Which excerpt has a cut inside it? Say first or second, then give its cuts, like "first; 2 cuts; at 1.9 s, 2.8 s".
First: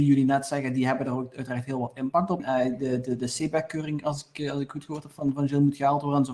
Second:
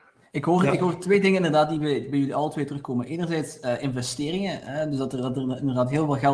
first; 1 cut; at 2.4 s